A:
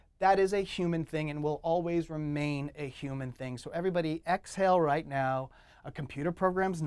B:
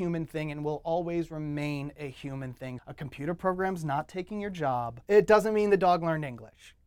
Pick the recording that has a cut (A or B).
B